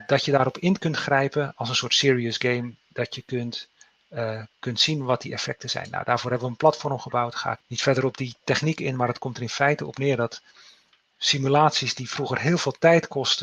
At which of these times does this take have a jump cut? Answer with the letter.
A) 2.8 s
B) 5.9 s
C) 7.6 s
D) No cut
C